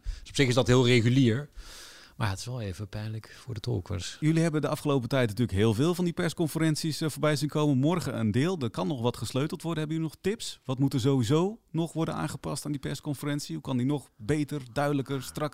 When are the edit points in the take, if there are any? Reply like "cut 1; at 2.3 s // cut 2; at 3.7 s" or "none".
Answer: none